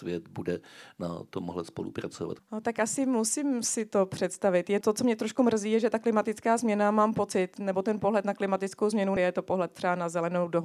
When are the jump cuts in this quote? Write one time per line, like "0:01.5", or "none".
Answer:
0:02.4
0:04.8
0:09.2